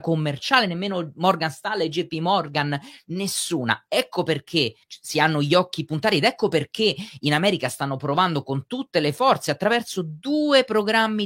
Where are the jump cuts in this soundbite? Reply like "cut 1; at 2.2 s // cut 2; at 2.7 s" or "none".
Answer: cut 1; at 4.8 s